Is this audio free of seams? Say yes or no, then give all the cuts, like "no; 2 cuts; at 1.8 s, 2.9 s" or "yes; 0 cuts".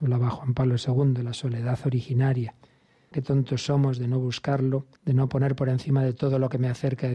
no; 2 cuts; at 3.1 s, 5.0 s